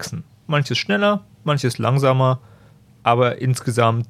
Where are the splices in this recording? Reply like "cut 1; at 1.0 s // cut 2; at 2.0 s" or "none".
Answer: none